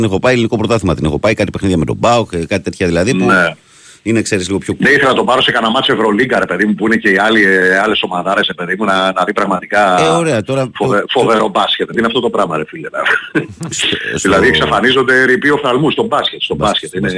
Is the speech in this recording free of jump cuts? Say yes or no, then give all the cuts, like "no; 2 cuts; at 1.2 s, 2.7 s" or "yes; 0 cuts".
no; 1 cut; at 11.9 s